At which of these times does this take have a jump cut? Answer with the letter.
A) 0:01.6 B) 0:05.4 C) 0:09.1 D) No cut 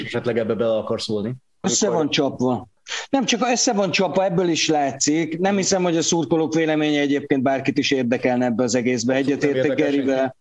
A